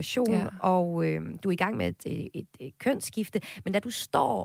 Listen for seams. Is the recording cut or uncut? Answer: uncut